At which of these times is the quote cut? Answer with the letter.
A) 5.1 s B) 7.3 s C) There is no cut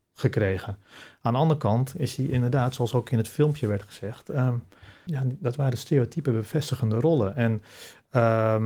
A